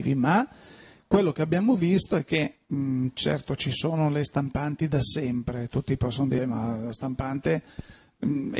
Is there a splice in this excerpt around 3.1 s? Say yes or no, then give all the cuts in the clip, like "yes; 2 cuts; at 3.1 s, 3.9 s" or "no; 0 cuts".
no; 1 cut; at 6.4 s